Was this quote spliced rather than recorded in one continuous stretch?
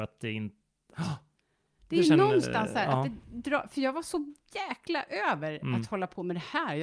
yes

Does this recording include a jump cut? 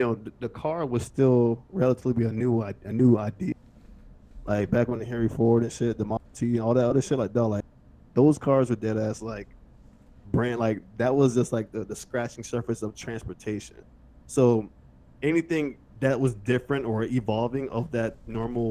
no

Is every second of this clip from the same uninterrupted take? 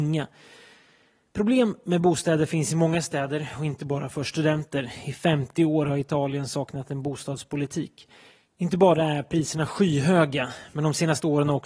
yes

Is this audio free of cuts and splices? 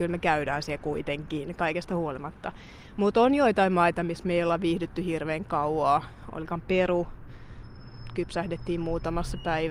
yes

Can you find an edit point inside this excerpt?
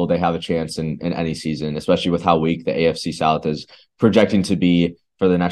no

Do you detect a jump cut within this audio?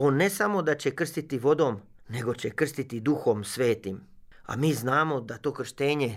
no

